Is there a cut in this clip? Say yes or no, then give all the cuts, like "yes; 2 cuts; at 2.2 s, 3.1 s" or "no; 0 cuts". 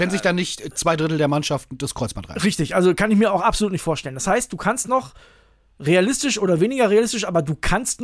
no; 0 cuts